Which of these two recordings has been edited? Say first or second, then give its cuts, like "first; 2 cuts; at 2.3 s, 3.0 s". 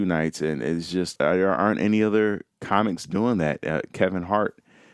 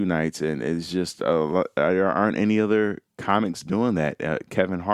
first; 1 cut; at 1.2 s